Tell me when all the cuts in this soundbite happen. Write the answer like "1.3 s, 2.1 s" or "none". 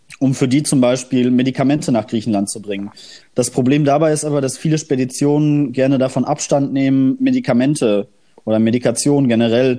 3.2 s